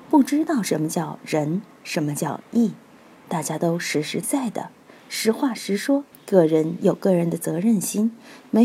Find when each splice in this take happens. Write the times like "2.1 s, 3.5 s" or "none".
4.2 s, 6.1 s

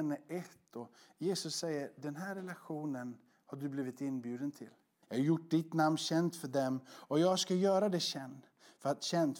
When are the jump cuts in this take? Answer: 5.0 s

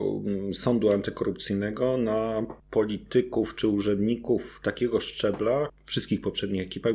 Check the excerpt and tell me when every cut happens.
2.6 s, 5.7 s

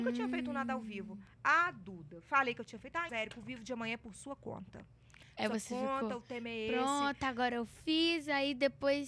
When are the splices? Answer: 3.1 s

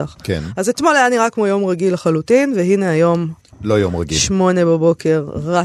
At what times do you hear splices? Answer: none

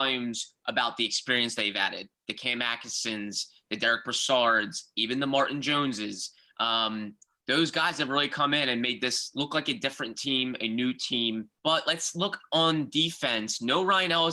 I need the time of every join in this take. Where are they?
11.6 s

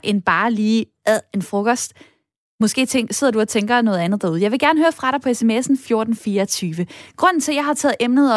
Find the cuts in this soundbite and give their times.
none

